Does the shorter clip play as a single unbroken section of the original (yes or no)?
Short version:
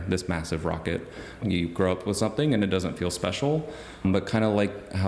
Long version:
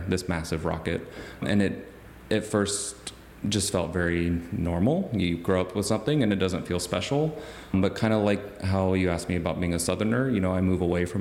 no